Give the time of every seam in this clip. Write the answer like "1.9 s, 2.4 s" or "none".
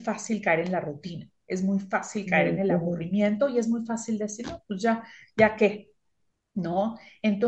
none